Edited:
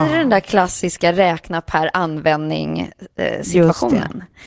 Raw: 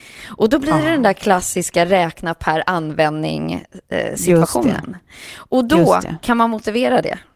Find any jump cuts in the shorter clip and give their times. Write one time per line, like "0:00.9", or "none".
none